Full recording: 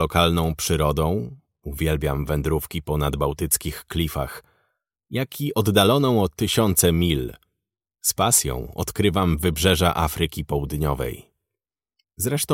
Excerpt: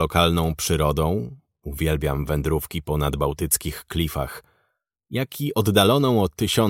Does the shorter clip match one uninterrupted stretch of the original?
yes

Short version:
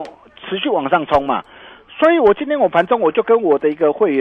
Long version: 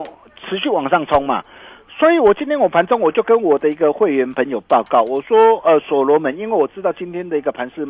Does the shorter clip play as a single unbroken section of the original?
yes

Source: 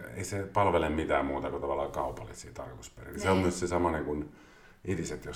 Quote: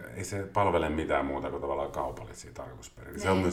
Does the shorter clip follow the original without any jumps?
yes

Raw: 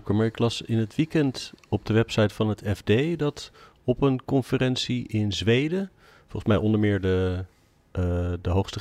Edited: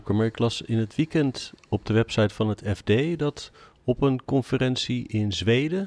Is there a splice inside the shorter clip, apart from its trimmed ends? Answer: no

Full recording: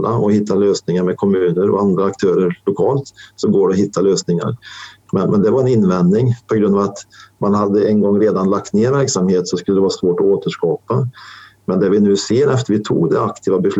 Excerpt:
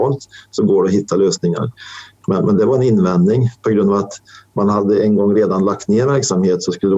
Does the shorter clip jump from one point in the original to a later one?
no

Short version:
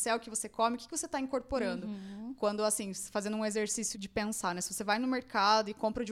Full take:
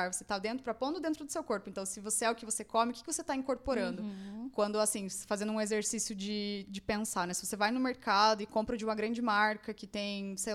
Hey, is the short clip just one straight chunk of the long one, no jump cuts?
no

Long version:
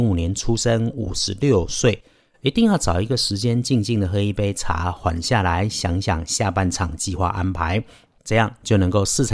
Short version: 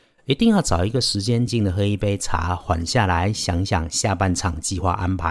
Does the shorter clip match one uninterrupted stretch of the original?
no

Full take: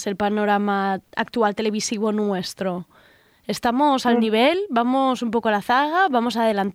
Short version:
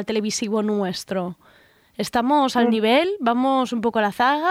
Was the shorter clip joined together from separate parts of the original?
no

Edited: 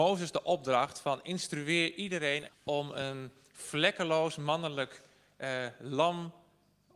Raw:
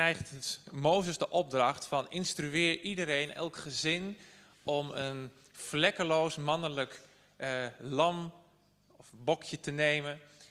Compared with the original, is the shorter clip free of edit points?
no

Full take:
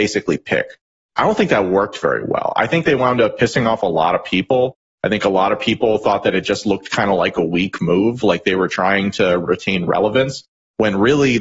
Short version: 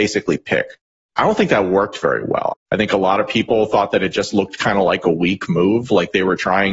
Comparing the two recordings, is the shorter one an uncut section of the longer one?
no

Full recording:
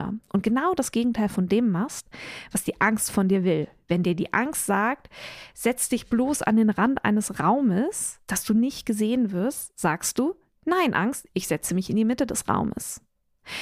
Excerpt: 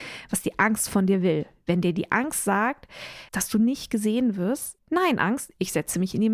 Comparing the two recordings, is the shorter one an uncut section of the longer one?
no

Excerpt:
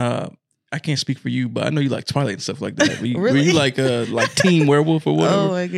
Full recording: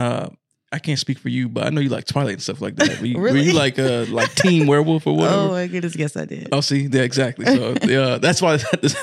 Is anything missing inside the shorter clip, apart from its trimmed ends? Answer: no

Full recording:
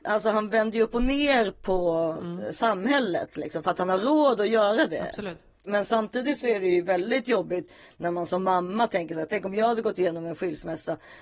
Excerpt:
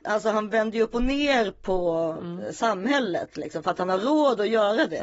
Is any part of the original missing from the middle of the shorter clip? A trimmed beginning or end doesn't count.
no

